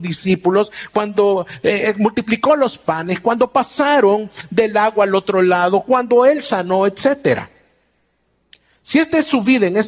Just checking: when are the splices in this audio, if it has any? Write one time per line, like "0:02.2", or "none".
none

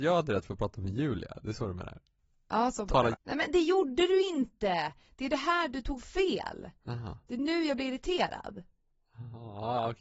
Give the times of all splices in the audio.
0:03.1

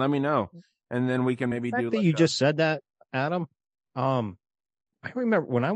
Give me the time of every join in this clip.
none

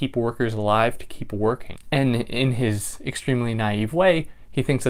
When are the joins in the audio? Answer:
none

